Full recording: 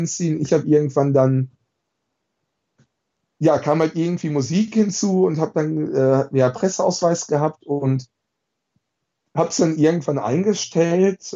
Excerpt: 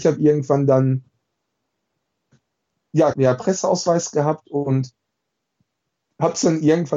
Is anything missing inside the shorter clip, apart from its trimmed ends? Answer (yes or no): yes